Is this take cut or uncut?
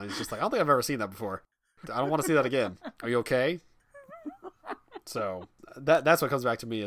uncut